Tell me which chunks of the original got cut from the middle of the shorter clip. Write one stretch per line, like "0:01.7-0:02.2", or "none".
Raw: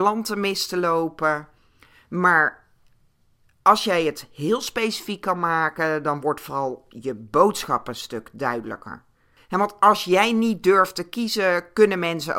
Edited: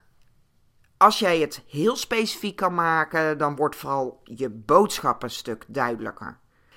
none